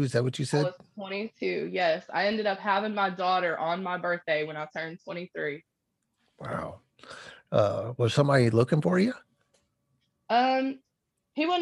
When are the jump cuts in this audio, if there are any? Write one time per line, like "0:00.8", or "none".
none